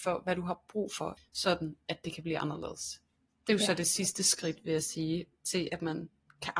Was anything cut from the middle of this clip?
yes; 1 cut; at 1.2 s

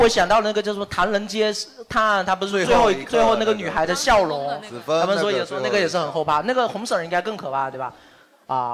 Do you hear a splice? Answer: no; 0 cuts

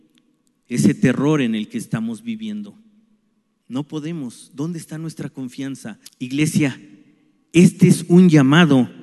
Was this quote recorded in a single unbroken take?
no; 1 cut; at 6.1 s

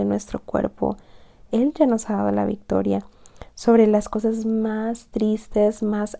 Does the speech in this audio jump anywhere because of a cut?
yes; 1 cut; at 1.5 s

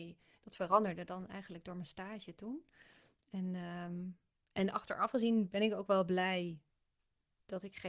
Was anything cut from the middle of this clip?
no; 0 cuts

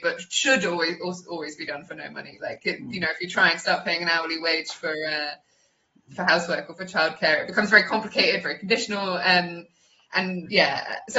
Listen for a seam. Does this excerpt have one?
no; 0 cuts

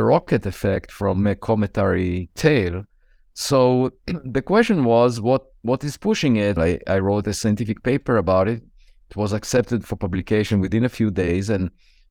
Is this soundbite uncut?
no; 1 cut; at 6.6 s

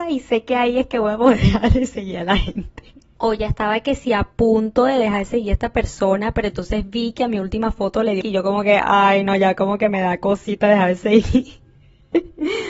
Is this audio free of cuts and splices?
no; 1 cut; at 8.2 s

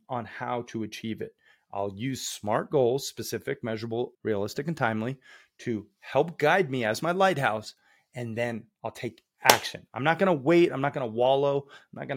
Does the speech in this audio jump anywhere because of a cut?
yes; 1 cut; at 4.1 s

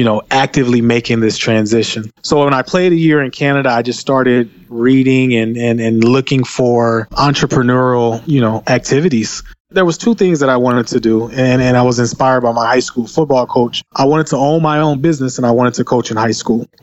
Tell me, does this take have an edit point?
no; 0 cuts

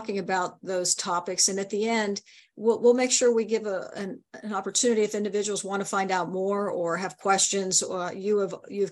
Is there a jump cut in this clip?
no; 0 cuts

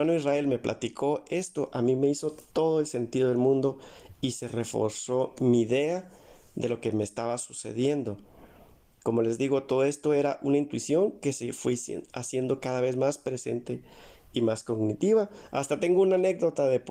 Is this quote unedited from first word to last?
yes; 0 cuts

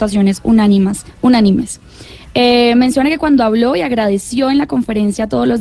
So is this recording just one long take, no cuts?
yes; 0 cuts

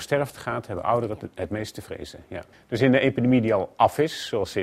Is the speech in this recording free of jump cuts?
no; 1 cut; at 2.5 s

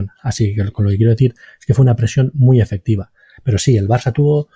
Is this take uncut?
no; 1 cut; at 3.4 s

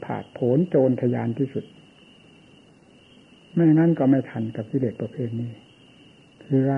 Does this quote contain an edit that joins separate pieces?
no; 0 cuts

